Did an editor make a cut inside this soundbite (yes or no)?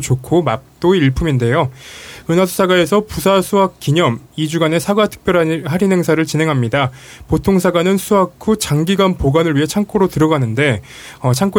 no